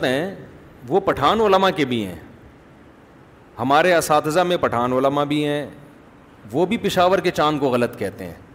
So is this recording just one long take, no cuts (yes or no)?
yes